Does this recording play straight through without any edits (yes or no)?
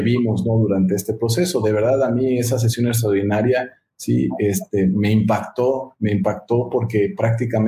yes